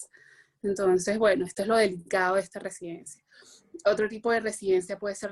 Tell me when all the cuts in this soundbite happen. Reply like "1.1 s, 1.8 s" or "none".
none